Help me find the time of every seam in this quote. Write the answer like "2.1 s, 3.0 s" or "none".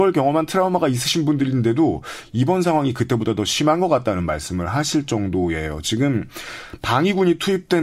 none